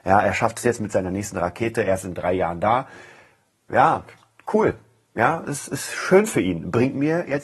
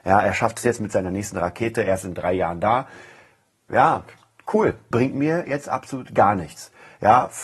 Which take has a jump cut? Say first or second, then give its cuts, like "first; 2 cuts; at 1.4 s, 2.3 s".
second; 1 cut; at 4.9 s